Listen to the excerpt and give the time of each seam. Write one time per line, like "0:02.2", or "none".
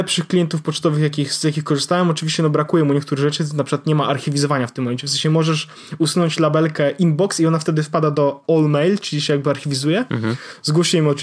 none